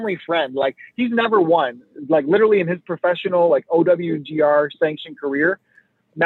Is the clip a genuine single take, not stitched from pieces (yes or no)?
yes